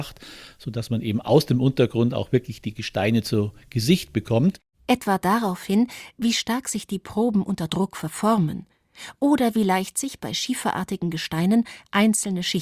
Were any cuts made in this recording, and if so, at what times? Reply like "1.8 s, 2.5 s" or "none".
4.7 s

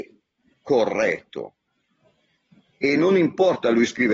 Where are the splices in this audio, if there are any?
none

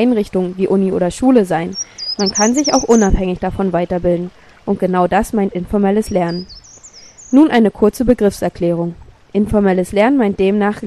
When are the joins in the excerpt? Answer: none

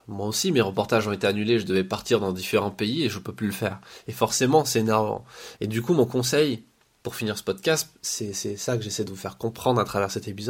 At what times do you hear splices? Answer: 5.6 s

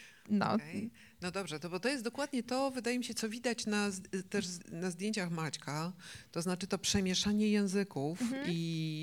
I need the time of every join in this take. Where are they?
4.6 s

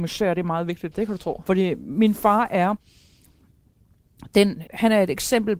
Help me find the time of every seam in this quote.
0.9 s, 4.7 s

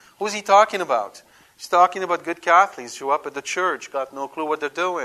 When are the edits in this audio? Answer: none

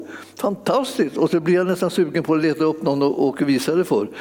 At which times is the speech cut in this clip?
none

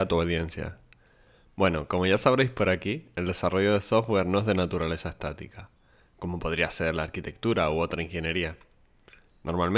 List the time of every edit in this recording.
none

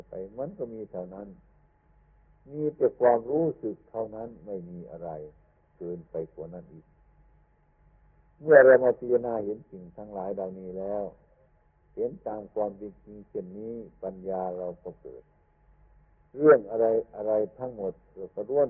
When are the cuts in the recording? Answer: none

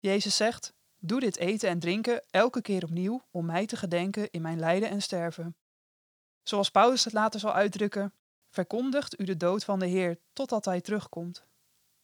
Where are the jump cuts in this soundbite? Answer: 8.4 s

